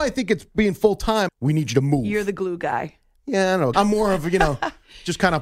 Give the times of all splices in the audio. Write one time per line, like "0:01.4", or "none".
0:01.3
0:03.7